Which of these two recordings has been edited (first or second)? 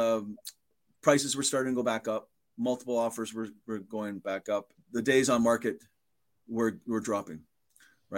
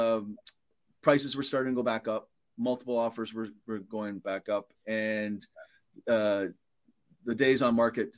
first